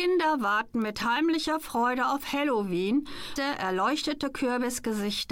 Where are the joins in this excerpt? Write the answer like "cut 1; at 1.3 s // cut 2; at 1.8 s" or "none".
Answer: cut 1; at 3.4 s

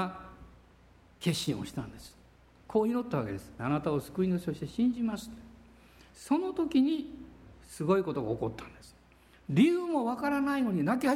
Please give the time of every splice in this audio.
cut 1; at 3.6 s

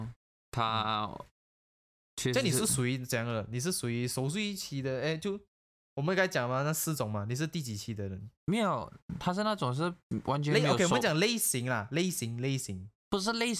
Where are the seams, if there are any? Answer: cut 1; at 8.4 s

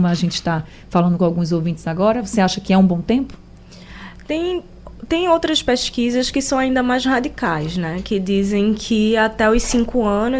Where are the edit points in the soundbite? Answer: none

